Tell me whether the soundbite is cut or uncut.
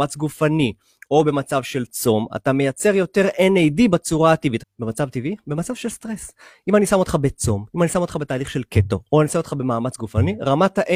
cut